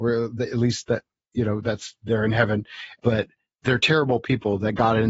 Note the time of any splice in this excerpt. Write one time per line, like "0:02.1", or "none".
none